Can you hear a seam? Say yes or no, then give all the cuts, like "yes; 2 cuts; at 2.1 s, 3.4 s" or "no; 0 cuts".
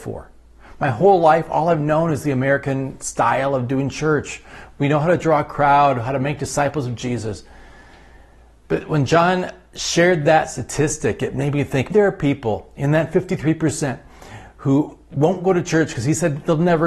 yes; 1 cut; at 11.9 s